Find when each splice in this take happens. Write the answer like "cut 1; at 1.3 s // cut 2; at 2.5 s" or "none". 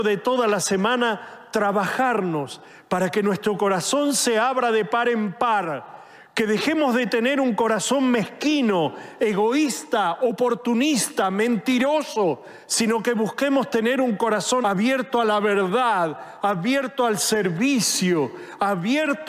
cut 1; at 14.6 s